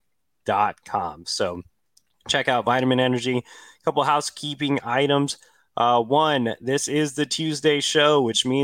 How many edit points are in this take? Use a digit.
0